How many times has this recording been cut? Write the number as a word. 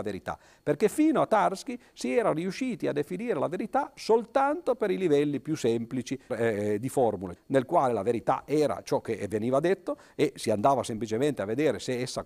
two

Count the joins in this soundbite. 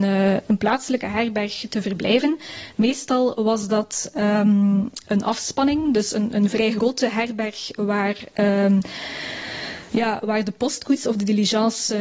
zero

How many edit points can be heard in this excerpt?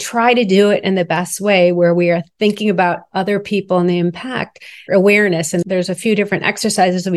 one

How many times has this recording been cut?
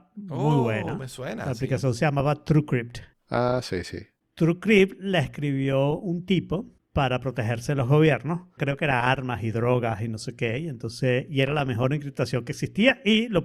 one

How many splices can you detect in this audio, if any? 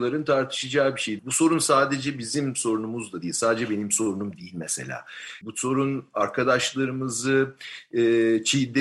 two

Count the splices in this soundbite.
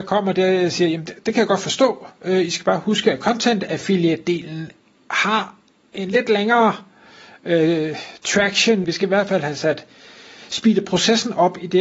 one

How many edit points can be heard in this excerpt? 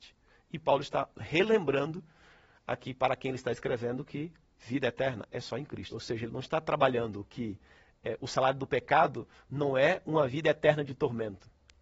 one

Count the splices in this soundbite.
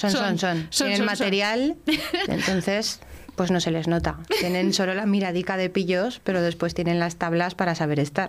one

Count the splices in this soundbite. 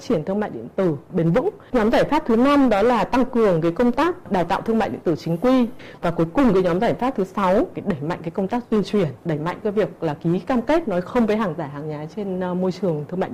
one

